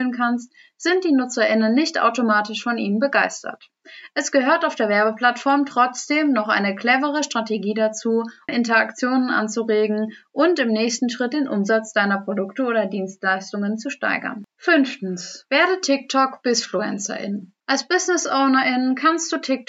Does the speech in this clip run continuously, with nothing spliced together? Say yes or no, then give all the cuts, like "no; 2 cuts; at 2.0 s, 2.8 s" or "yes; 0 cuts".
no; 1 cut; at 8.5 s